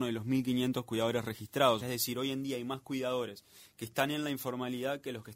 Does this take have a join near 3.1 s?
no; 1 cut; at 1.8 s

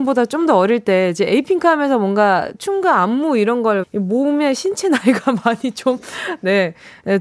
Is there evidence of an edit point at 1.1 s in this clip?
no; 2 cuts; at 2.6 s, 3.8 s

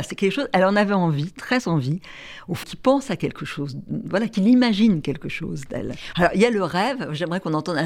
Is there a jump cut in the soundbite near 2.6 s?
yes; 2 cuts; at 2.6 s, 6.1 s

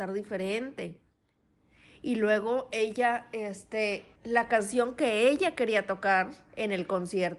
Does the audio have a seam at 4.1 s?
yes; 1 cut; at 4.1 s

